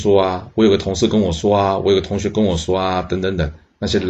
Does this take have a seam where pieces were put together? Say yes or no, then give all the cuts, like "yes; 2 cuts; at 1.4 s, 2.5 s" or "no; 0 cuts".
no; 0 cuts